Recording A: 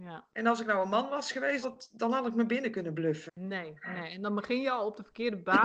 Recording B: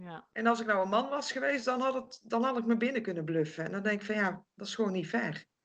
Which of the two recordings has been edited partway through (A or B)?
A